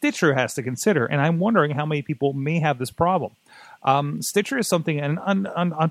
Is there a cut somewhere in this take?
no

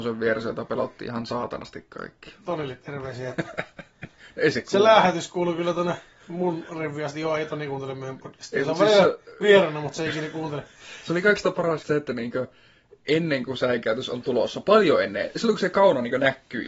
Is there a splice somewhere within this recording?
yes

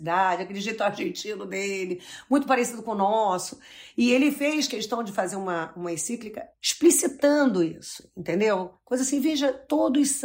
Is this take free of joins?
yes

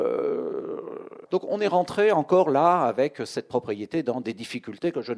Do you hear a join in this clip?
yes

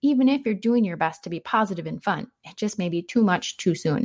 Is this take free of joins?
yes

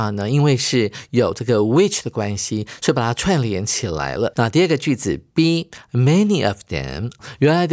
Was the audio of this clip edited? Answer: yes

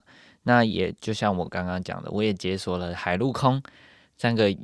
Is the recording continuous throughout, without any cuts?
yes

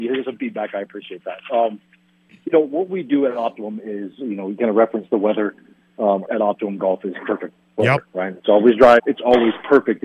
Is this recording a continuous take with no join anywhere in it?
no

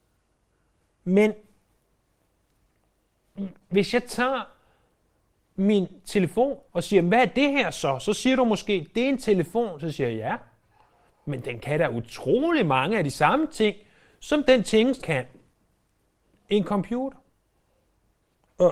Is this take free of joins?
no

